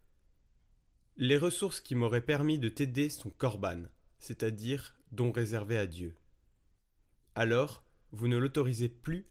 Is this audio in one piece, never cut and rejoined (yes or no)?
yes